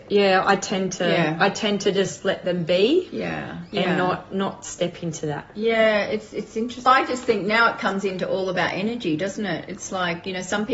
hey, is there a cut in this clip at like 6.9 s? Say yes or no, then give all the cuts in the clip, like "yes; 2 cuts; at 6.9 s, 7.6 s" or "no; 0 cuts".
yes; 1 cut; at 6.9 s